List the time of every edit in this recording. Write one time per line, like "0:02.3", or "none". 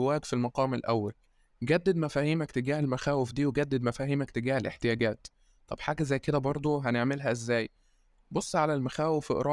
none